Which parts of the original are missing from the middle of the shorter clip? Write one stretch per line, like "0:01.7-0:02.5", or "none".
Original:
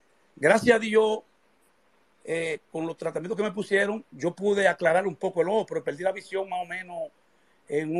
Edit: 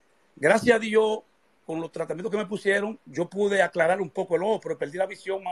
0:01.6-0:02.6